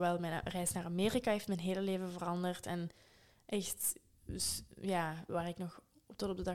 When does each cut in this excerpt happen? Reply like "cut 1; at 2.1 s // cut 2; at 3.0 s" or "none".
cut 1; at 5.3 s